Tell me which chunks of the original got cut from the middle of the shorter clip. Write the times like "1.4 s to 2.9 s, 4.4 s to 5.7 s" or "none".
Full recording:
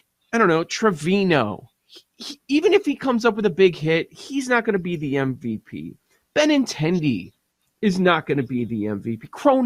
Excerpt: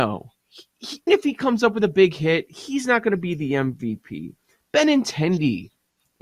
2.4 s to 2.7 s